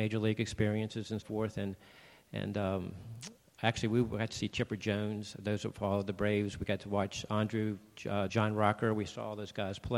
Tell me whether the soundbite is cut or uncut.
cut